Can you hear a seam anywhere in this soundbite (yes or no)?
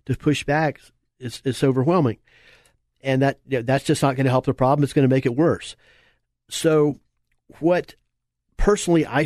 no